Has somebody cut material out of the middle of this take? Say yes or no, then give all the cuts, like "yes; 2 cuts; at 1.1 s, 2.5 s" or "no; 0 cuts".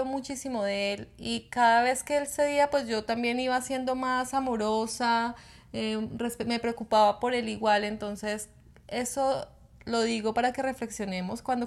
no; 0 cuts